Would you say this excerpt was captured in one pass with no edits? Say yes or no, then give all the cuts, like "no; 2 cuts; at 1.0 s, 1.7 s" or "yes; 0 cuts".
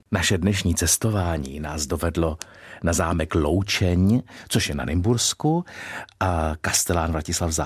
yes; 0 cuts